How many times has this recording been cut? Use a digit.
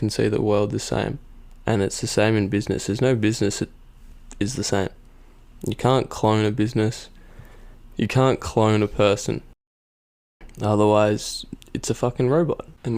1